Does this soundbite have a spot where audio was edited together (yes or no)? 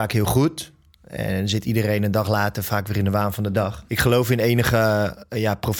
yes